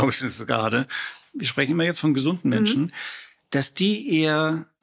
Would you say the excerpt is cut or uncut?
cut